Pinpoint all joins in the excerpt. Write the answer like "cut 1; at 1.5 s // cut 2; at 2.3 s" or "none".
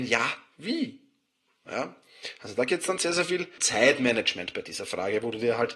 cut 1; at 3.6 s

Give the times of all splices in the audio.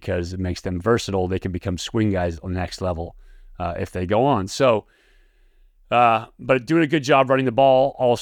none

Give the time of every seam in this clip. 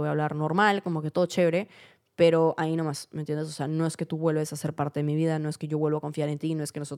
none

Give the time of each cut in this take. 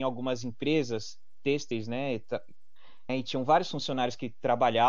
cut 1; at 3.1 s

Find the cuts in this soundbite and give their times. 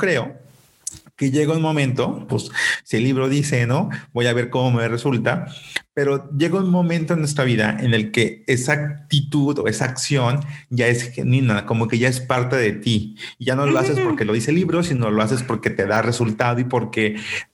cut 1; at 2.3 s

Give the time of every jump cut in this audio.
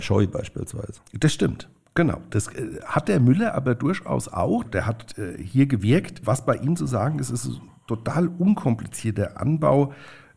cut 1; at 4.6 s

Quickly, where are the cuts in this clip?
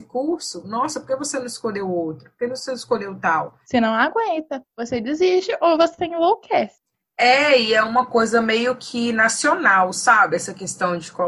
cut 1; at 3.6 s

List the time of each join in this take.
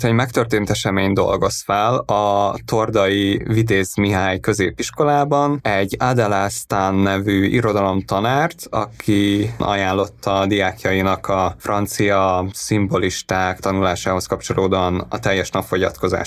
none

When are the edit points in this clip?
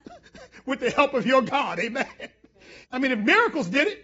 cut 1; at 2.8 s

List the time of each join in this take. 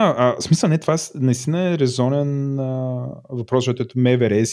none

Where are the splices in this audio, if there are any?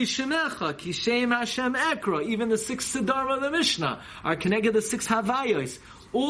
none

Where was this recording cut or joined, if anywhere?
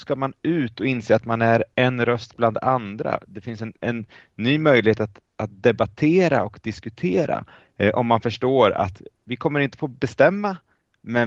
cut 1; at 3.8 s

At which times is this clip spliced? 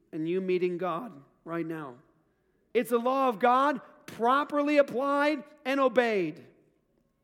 cut 1; at 2.7 s

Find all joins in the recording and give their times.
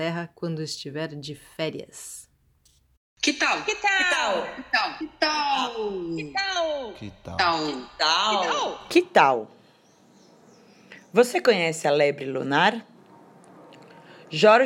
cut 1; at 5.0 s

